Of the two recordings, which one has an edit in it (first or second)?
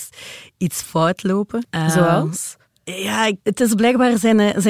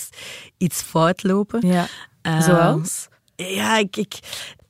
first